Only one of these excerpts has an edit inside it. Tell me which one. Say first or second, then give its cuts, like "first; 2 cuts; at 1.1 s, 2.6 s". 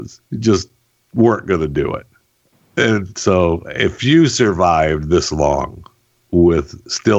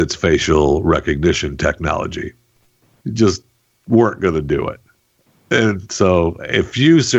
second; 1 cut; at 3.0 s